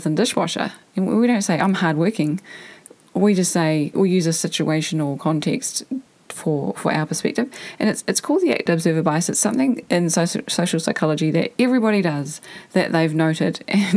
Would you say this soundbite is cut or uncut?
cut